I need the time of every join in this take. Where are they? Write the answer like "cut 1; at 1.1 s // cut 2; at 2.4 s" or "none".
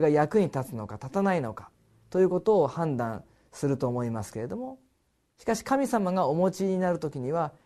none